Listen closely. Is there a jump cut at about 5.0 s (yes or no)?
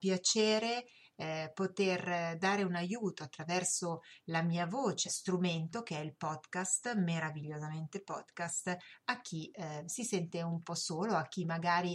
yes